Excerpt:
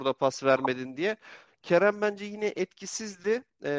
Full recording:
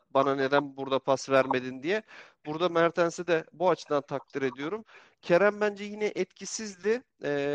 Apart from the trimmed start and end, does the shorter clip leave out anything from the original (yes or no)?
yes